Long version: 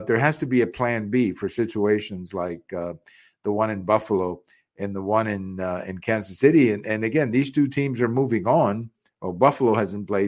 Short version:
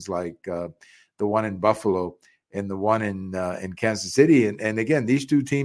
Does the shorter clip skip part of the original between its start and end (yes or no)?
no